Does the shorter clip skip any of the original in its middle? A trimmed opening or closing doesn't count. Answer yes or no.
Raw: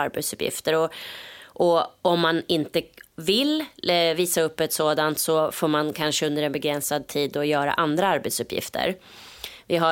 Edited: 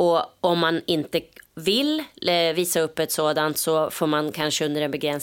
no